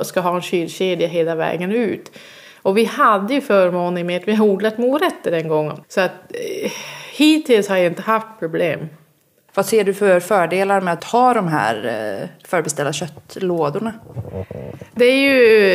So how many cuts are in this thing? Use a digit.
2